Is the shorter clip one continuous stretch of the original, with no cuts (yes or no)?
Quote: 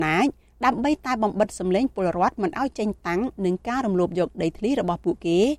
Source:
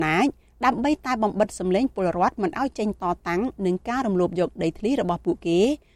no